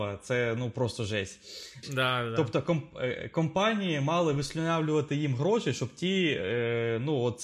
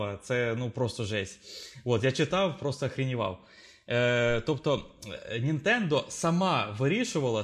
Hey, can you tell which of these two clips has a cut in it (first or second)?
first